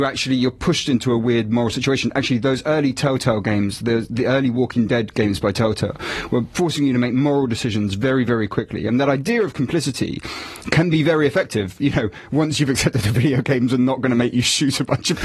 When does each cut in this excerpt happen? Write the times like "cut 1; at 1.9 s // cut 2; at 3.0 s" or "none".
none